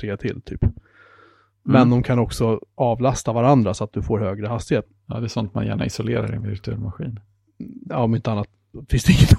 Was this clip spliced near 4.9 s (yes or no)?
yes